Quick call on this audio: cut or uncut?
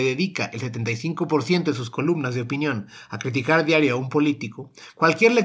uncut